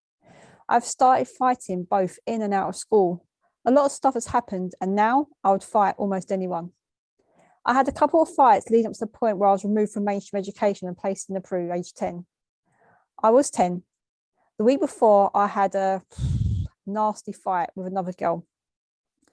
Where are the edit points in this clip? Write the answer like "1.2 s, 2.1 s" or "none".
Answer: 13.1 s